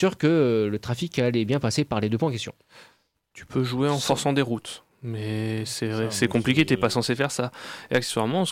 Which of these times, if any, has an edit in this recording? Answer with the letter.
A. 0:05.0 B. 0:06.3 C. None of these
C